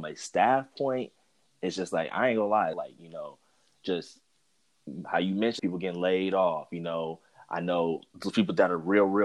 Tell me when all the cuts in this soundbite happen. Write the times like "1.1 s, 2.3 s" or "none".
2.7 s, 5.6 s